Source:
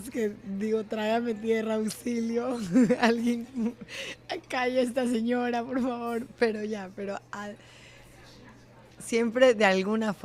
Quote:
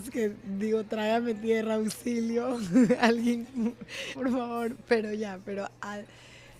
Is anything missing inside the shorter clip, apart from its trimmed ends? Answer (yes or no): yes